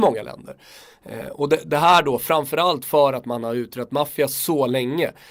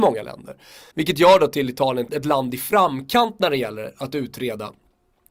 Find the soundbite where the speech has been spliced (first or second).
second